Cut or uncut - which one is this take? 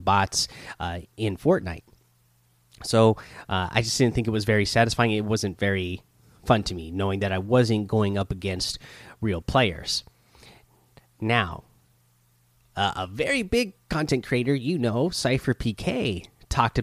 uncut